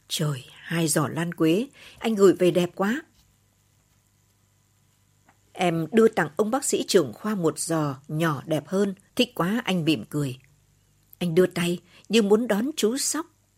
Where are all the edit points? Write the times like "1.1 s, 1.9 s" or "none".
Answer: 9.1 s